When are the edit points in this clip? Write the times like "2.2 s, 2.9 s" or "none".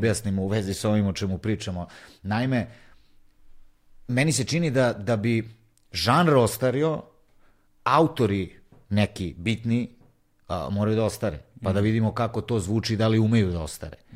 none